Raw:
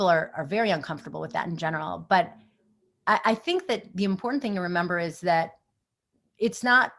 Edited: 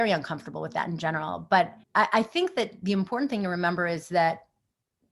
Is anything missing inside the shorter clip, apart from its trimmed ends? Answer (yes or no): yes